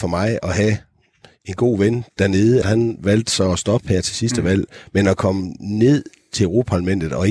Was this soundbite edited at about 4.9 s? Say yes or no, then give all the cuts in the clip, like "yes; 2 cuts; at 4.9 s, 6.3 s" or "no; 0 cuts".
no; 1 cut; at 2.6 s